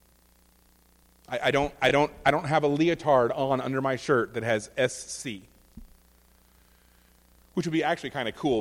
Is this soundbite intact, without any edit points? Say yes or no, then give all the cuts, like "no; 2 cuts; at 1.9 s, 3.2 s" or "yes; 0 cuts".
yes; 0 cuts